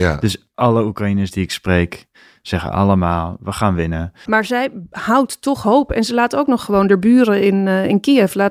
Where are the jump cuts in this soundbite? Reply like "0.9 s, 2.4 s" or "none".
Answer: 4.3 s